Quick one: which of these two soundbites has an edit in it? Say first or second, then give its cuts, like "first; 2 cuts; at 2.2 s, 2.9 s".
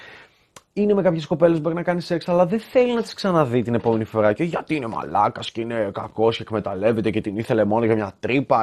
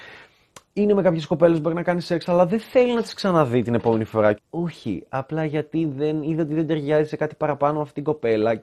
second; 1 cut; at 4.4 s